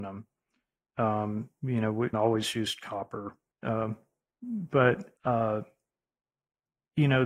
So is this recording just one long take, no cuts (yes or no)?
no